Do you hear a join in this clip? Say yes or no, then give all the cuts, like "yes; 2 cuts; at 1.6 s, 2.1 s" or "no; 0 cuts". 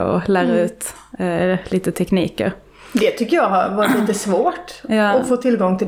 no; 0 cuts